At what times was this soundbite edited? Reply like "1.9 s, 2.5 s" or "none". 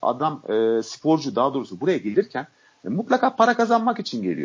none